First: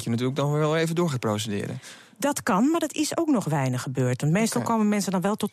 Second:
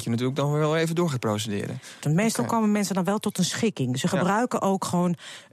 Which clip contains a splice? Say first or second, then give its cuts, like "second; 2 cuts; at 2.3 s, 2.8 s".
second; 1 cut; at 2.0 s